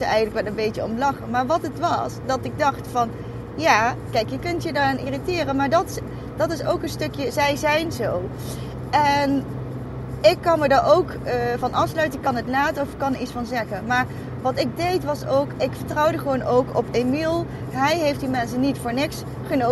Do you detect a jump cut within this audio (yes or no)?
no